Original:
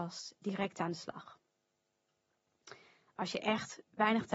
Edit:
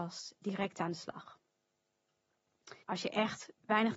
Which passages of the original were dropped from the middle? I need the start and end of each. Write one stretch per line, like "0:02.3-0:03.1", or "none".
0:02.8-0:03.1